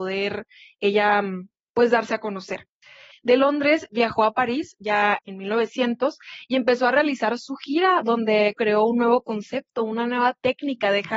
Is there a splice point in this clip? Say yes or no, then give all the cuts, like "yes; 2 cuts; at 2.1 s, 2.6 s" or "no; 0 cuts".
yes; 3 cuts; at 3.1 s, 5.2 s, 8.5 s